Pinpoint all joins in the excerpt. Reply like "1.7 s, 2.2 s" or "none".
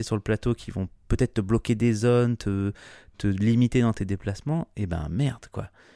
3.1 s